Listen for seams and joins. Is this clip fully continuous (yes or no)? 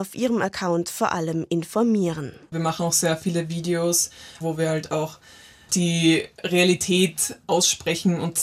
no